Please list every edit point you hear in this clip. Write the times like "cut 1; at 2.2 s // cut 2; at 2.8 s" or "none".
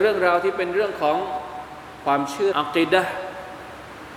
cut 1; at 2.5 s